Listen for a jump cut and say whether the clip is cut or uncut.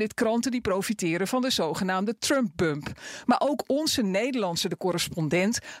uncut